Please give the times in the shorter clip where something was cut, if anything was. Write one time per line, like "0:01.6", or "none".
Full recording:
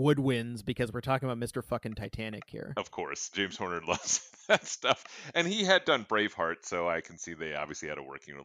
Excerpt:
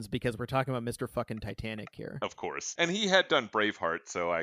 0:02.8